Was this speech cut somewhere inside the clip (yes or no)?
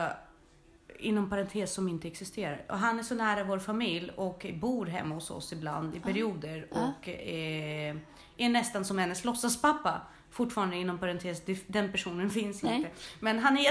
no